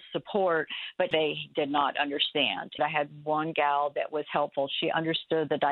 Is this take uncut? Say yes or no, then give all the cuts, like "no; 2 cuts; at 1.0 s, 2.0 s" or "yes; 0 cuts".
no; 2 cuts; at 1.1 s, 2.8 s